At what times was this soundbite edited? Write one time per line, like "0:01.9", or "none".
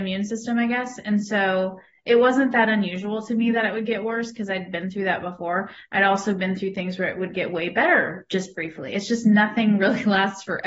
none